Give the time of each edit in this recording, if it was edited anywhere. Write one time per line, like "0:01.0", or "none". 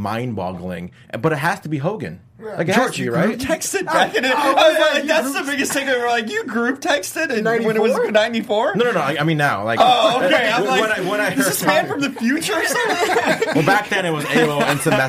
0:02.3